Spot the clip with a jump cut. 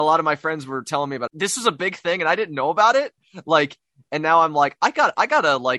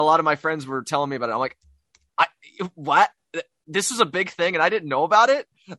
first; 1 cut; at 1.3 s

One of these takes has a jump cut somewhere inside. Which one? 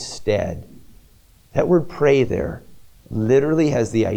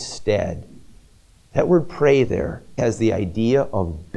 second; 1 cut; at 2.8 s

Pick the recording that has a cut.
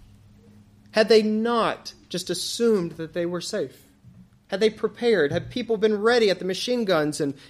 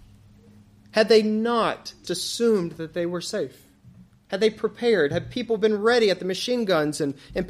second; 1 cut; at 2.0 s

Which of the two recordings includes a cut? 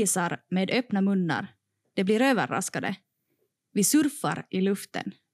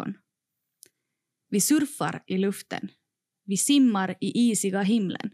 first; 1 cut; at 3.6 s

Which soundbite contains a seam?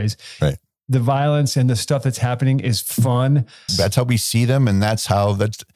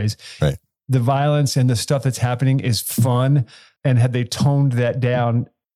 first; 1 cut; at 3.7 s

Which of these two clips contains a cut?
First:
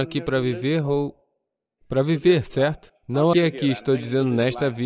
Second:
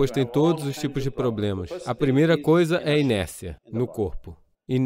first; 2 cuts; at 1.8 s, 3.3 s

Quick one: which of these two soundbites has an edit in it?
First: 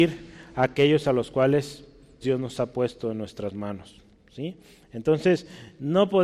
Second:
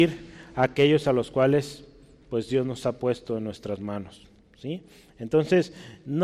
first; 1 cut; at 2.2 s

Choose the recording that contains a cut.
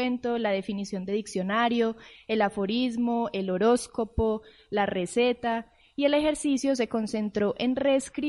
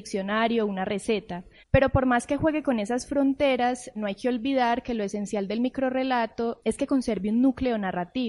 second; 3 cuts; at 1.6 s, 3.9 s, 6.6 s

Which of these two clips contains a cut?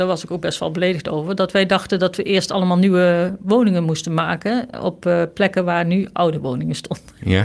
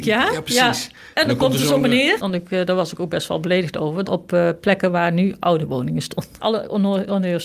second; 3 cuts; at 2.2 s, 4.1 s, 6.4 s

